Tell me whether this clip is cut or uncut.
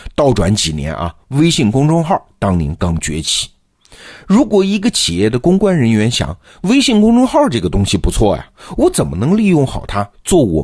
cut